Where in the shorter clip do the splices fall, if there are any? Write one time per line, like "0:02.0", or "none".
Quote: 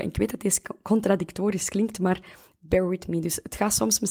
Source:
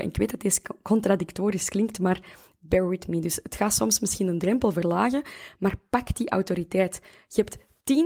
none